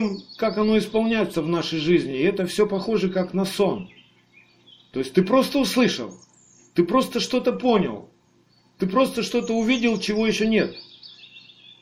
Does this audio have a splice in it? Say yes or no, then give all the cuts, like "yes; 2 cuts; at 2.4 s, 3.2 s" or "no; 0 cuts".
no; 0 cuts